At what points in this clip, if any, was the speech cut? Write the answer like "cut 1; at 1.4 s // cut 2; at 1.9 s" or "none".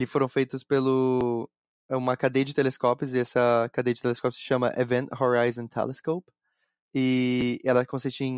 none